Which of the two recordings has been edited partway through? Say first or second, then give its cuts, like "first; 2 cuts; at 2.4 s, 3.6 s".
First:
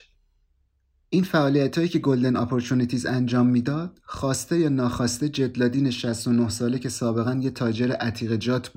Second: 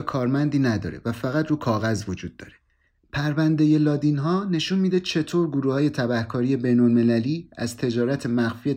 second; 1 cut; at 3.0 s